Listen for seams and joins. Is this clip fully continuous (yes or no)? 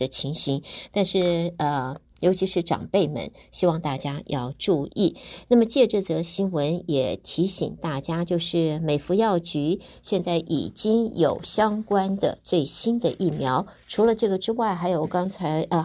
yes